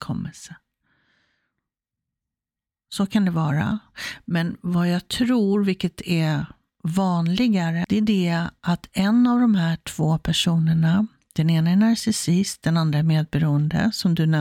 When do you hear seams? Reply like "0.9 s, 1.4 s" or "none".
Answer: 7.8 s